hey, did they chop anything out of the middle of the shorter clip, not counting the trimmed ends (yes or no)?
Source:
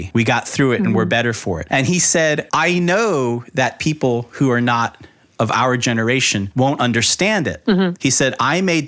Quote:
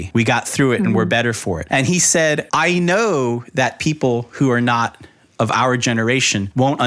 no